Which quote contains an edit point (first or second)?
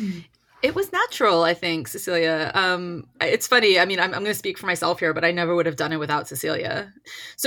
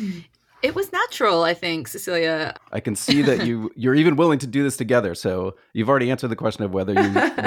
second